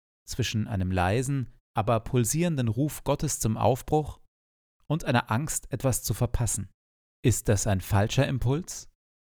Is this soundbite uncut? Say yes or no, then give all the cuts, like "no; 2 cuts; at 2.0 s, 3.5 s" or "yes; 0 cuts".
no; 1 cut; at 7.1 s